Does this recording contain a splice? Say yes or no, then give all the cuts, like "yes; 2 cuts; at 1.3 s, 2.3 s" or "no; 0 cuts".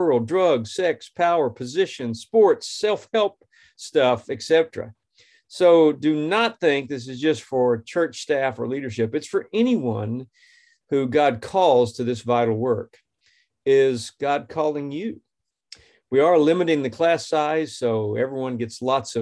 no; 0 cuts